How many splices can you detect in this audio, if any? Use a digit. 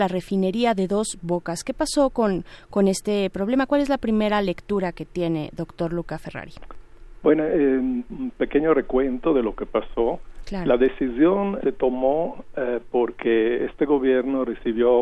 2